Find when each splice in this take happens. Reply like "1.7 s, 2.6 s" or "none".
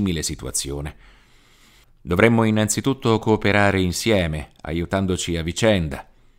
1.8 s